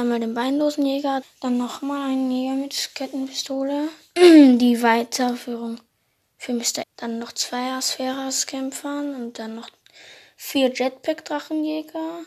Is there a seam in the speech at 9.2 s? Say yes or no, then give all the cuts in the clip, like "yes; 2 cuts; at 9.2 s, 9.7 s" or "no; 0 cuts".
no; 2 cuts; at 1.2 s, 6.8 s